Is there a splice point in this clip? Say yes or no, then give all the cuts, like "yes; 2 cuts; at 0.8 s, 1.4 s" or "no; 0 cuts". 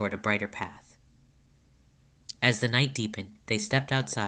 no; 0 cuts